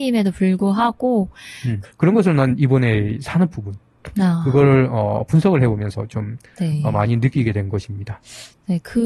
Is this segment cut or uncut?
cut